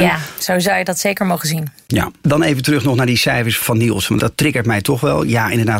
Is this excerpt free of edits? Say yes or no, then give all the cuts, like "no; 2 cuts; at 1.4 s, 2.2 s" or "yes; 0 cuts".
yes; 0 cuts